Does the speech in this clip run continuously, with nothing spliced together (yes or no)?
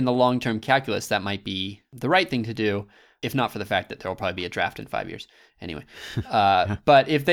yes